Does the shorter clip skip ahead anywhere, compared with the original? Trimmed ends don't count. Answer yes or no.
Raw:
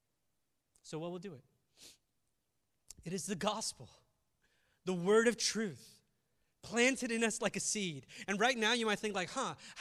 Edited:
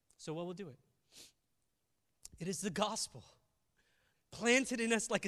yes